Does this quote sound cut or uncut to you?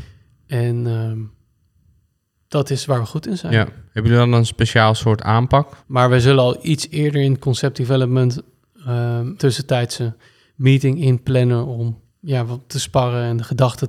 cut